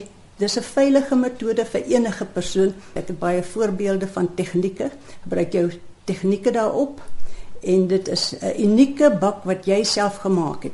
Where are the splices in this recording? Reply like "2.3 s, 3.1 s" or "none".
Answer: 3.0 s